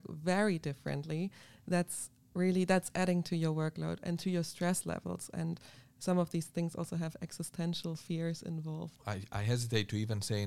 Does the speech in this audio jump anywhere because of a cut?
yes; 1 cut; at 9.0 s

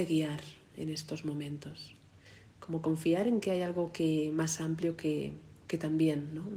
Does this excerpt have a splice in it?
no; 0 cuts

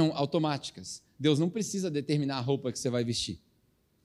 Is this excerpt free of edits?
yes; 0 cuts

